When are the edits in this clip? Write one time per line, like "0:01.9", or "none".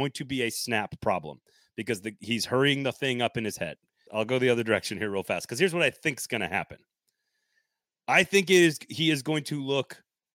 0:04.1